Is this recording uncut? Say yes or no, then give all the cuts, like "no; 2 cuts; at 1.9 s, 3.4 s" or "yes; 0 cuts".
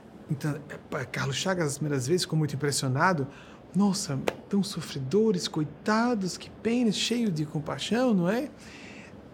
yes; 0 cuts